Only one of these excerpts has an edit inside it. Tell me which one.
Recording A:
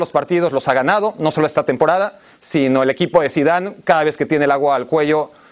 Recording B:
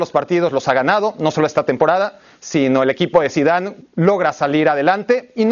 B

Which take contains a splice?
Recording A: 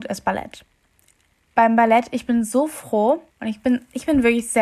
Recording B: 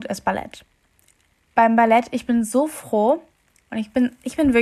A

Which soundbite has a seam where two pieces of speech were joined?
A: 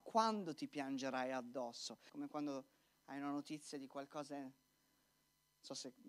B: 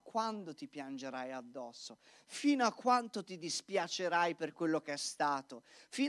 A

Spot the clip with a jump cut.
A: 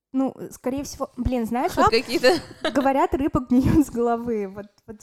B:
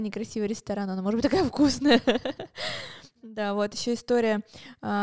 A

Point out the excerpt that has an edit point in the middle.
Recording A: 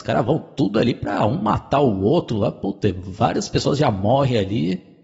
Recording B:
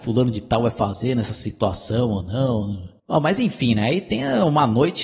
B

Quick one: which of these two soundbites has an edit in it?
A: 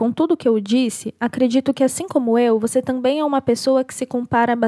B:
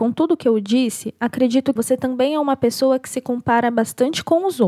B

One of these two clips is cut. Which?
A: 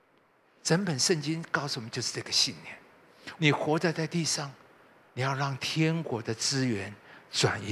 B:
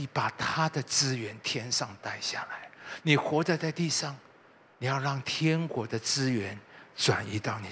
A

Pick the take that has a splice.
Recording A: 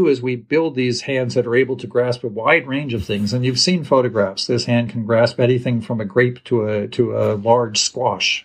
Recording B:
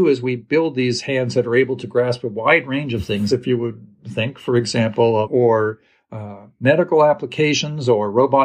B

